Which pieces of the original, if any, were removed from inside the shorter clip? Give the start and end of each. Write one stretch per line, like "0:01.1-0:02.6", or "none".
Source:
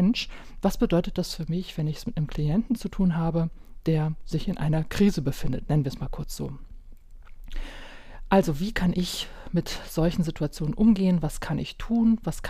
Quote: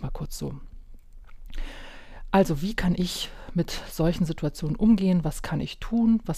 none